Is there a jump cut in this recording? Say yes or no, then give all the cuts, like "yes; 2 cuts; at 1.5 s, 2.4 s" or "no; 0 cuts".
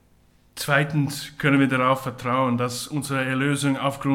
no; 0 cuts